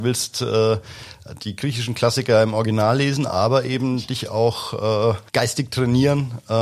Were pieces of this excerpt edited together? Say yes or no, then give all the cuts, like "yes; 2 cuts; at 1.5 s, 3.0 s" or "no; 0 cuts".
yes; 1 cut; at 5.3 s